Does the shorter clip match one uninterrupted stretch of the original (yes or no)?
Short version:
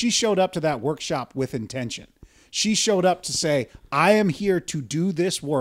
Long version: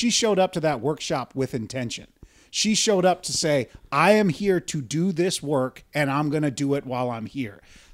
yes